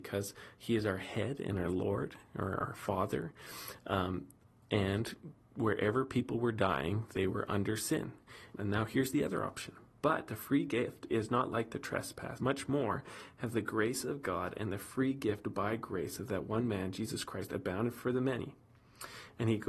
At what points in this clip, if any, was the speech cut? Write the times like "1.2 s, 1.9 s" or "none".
8.5 s, 12.4 s